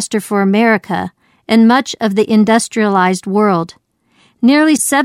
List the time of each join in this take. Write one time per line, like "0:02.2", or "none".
none

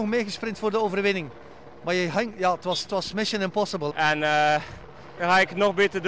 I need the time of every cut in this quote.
0:03.9
0:05.2

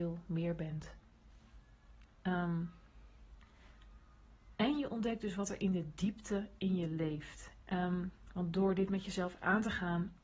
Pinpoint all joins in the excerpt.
0:07.6

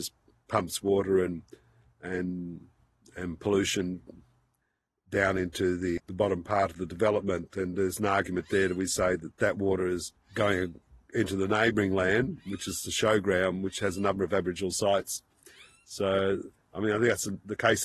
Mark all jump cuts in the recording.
0:06.0

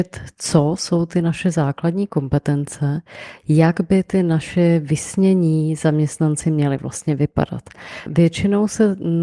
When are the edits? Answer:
0:08.1

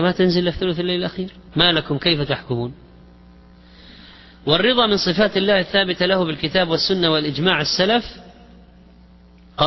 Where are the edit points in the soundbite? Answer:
0:01.5

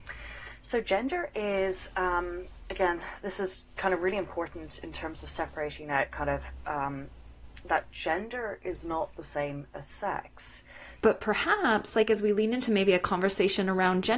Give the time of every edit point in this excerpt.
0:11.0

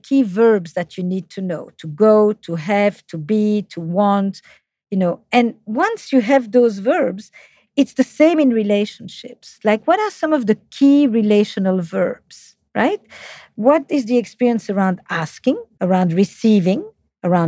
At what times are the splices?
0:15.8

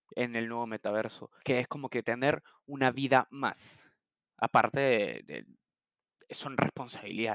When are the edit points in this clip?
0:01.4

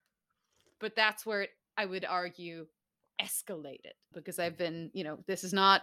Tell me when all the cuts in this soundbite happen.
0:04.1

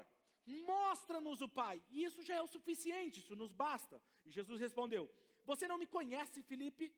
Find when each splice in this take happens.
none

